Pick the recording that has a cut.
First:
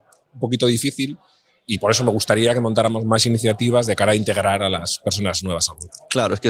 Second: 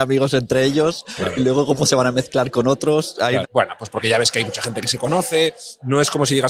second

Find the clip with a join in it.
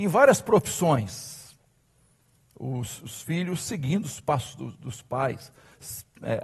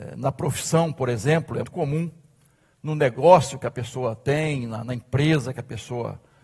second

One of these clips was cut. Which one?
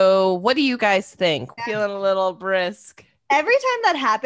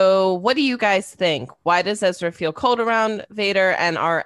first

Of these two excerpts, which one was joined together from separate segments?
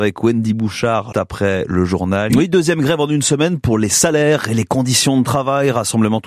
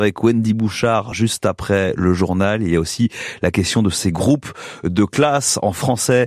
first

